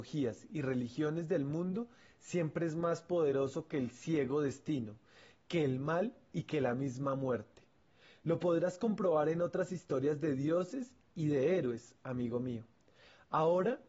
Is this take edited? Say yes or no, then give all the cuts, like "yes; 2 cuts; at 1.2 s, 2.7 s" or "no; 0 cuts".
no; 0 cuts